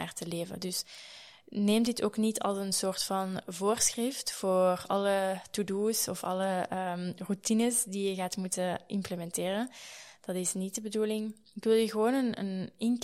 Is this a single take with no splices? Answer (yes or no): yes